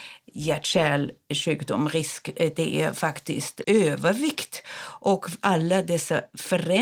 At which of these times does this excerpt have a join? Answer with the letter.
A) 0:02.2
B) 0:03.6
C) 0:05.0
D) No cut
B